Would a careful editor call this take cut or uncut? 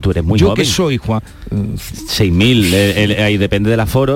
cut